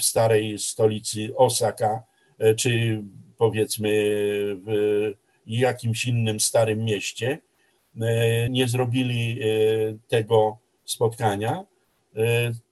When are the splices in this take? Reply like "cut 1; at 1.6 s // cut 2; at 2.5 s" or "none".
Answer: cut 1; at 8.5 s